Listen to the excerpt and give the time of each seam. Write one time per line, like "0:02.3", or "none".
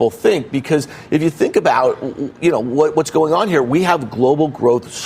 none

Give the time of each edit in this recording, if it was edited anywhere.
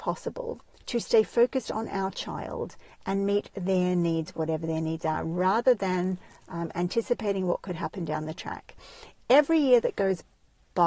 none

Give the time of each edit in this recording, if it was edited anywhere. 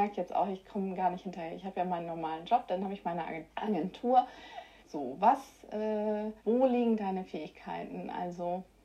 0:03.5
0:04.8
0:06.4

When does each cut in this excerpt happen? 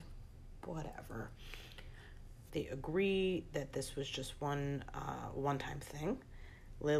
0:02.5

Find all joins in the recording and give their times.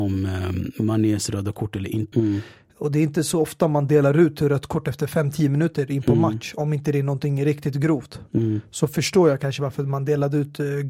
0:02.1

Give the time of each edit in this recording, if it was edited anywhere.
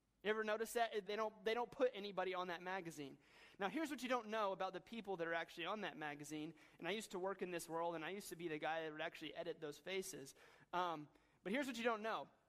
0:01.1

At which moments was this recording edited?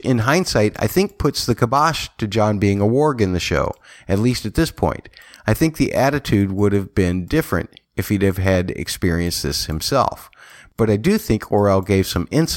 none

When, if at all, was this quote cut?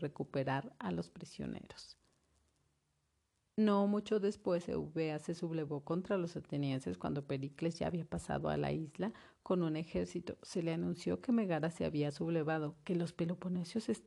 none

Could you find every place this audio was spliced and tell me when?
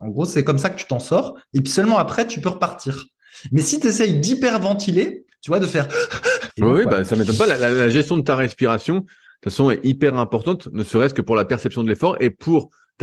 0:06.5

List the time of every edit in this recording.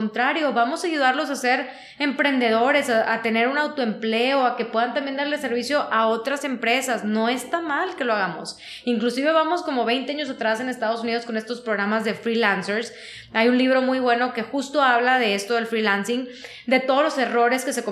none

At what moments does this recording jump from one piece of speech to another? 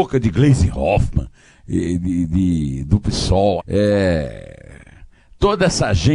0:03.6

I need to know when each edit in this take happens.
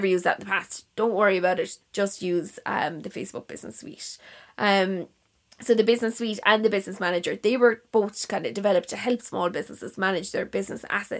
0:01.8

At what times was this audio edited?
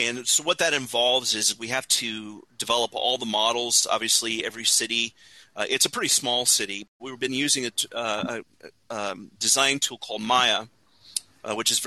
0:07.0

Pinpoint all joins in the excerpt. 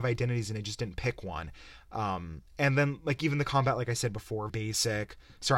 0:02.5
0:04.5

